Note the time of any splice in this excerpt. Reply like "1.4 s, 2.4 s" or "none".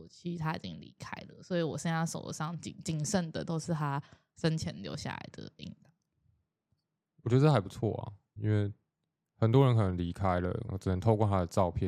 8.4 s, 10.7 s